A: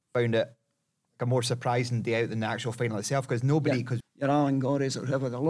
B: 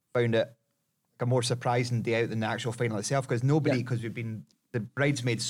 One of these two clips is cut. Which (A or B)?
A